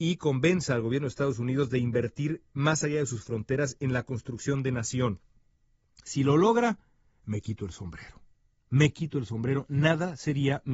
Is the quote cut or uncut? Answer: uncut